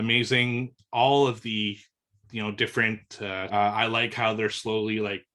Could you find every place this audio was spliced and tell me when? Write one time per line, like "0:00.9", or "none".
0:03.5